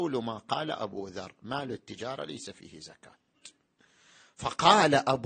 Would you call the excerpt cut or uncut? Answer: uncut